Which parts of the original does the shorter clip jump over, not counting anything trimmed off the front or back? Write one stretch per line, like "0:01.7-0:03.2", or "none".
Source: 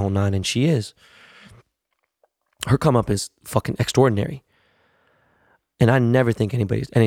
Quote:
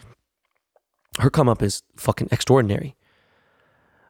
none